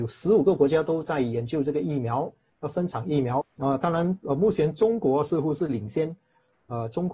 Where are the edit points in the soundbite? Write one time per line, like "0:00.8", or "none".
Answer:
0:03.4